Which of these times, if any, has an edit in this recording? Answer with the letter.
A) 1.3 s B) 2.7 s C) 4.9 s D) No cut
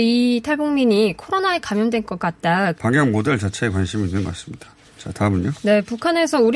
B